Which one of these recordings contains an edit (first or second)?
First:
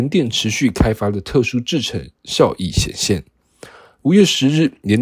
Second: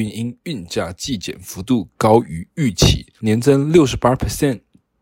second